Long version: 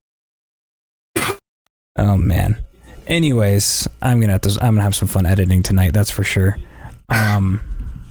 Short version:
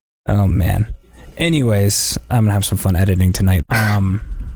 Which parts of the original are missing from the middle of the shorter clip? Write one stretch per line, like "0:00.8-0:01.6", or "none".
0:04.0-0:04.6
0:05.9-0:07.0